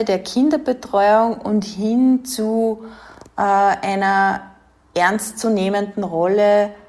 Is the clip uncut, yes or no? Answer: yes